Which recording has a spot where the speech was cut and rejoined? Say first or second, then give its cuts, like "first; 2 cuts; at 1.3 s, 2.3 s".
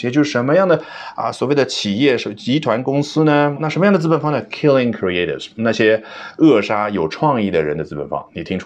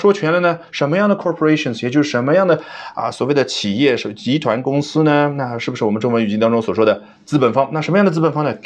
first; 1 cut; at 3.6 s